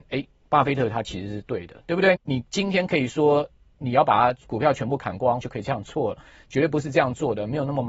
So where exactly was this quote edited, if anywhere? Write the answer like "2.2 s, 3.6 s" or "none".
2.2 s, 5.4 s